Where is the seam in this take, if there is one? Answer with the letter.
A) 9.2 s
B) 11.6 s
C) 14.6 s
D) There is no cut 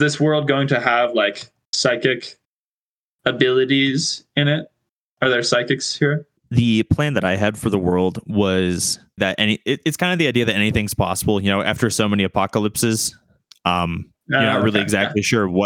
A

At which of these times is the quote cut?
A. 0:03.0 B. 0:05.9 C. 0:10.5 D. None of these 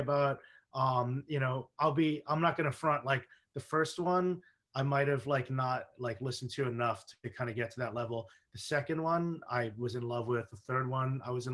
B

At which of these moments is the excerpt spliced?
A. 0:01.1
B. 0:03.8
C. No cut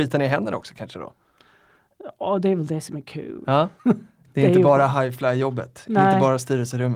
B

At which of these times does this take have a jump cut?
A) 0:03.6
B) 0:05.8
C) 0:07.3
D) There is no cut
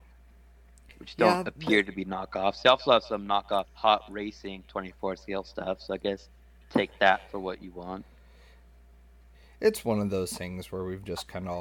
A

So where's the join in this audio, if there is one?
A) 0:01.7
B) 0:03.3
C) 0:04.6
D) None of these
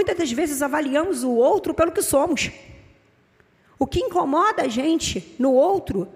D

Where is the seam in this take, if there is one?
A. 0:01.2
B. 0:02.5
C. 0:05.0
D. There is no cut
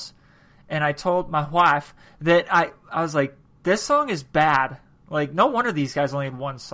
D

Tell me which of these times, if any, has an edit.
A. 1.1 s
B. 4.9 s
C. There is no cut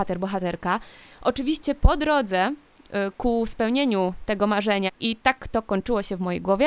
B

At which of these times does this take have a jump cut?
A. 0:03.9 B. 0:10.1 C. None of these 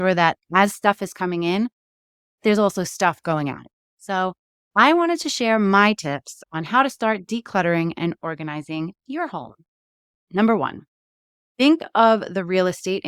B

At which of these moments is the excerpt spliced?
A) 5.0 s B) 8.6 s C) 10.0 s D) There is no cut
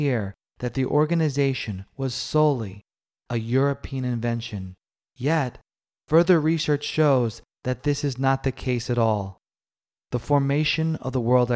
C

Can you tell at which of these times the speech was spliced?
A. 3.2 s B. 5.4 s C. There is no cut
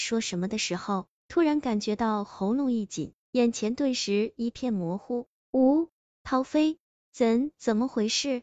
A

